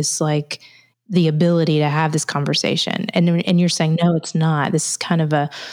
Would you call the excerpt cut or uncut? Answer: cut